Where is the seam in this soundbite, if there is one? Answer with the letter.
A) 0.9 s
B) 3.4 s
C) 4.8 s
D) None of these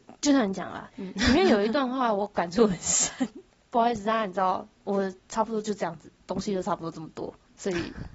A